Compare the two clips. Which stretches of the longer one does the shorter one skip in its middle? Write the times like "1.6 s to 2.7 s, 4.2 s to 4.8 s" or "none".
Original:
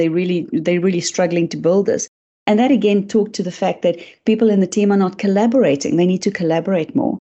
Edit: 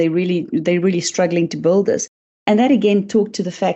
none